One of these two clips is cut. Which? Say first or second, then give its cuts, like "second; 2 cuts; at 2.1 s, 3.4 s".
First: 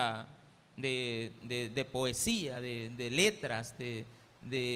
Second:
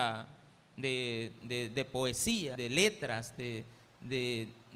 second; 1 cut; at 2.6 s